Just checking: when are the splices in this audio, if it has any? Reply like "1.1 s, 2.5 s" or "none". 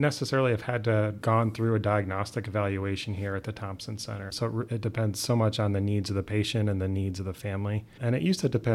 4.3 s